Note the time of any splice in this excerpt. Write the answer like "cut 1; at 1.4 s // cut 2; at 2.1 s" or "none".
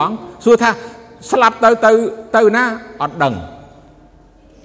none